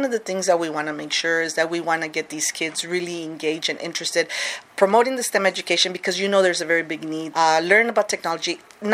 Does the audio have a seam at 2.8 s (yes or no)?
no